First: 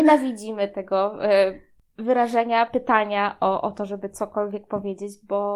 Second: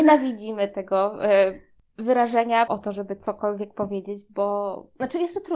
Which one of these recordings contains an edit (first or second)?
second